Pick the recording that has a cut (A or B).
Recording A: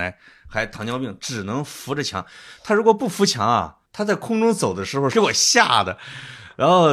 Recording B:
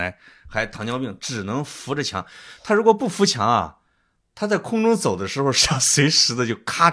A